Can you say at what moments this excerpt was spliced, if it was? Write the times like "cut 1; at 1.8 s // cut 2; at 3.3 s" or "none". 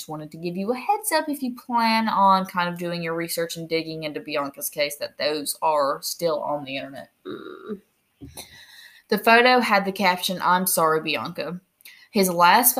none